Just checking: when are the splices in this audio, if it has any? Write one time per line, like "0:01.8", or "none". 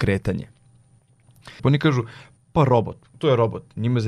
0:01.6
0:03.1

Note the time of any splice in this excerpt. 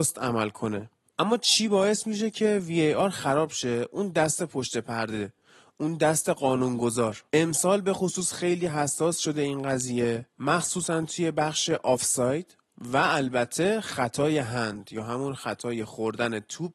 none

